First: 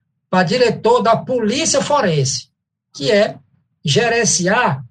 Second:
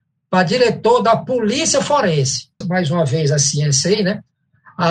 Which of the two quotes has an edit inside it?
second; 1 cut; at 2.6 s

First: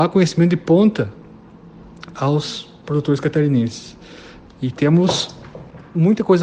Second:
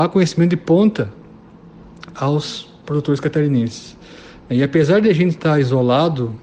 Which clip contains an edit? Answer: first; 1 cut; at 4.5 s

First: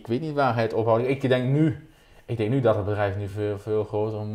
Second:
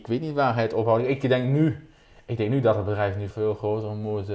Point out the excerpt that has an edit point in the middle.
second; 1 cut; at 3.3 s

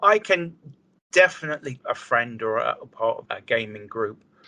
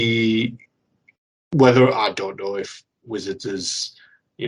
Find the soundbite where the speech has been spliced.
first; 2 cuts; at 1.8 s, 3.2 s

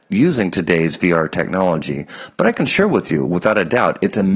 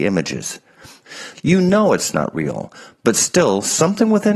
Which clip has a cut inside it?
second; 1 cut; at 1.3 s

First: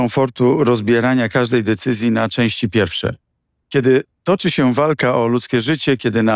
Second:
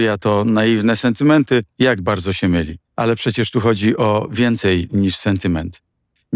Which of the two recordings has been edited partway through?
second; 2 cuts; at 1.7 s, 2.8 s

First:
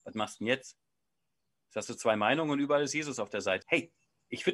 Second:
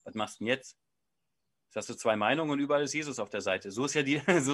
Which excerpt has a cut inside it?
first; 1 cut; at 3.6 s

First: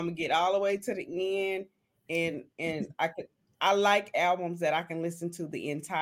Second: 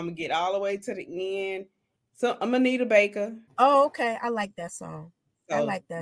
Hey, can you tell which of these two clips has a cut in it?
second; 2 cuts; at 2.0 s, 3.5 s

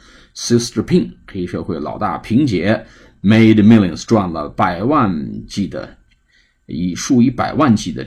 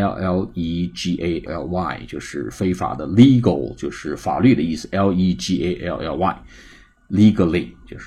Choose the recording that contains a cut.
second; 1 cut; at 1.5 s

